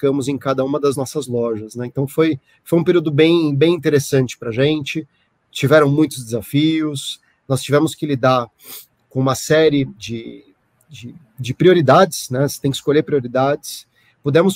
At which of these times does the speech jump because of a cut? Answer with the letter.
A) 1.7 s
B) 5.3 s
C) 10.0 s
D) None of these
C